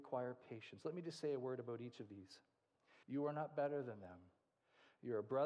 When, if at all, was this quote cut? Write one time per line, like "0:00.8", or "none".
0:03.0